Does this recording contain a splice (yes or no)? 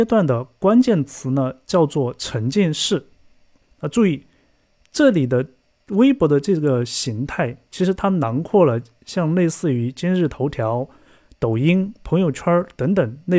yes